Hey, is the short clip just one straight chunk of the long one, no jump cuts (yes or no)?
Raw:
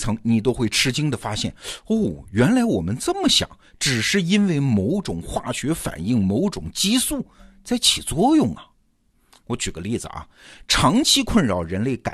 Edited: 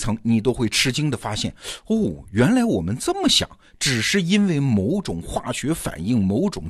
yes